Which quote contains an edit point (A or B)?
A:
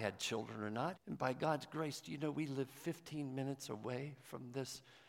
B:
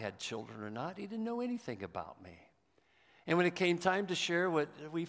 A